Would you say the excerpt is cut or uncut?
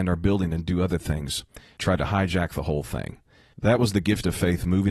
cut